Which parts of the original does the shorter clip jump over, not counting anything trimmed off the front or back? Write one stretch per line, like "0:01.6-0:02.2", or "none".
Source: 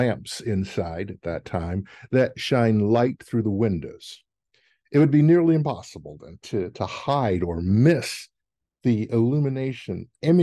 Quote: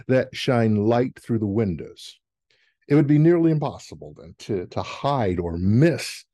none